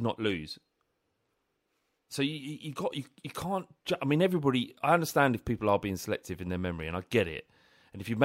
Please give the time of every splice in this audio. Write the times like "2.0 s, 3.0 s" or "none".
none